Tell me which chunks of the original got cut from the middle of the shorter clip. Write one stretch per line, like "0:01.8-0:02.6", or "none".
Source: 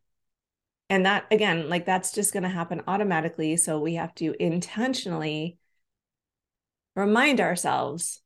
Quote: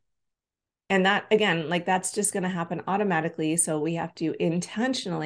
none